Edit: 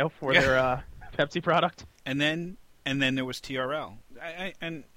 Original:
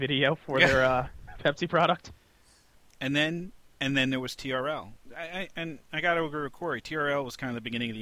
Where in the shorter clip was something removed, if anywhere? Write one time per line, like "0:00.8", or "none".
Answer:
0:01.9